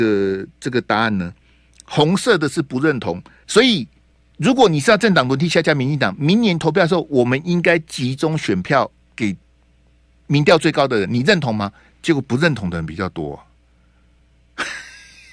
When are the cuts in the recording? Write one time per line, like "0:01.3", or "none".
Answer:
0:03.4